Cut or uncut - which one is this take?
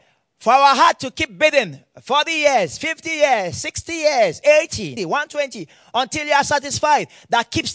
cut